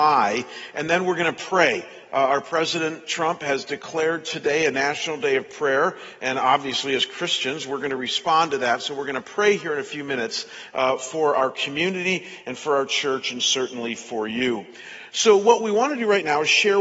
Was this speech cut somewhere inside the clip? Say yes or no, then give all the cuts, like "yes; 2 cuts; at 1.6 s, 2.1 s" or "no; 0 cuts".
no; 0 cuts